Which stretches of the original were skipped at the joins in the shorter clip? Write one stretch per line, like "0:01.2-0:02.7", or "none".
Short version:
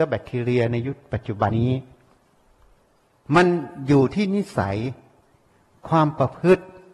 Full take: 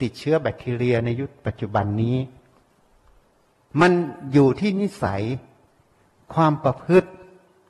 0:01.8-0:02.0